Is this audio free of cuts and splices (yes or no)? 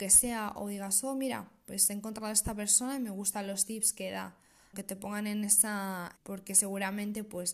no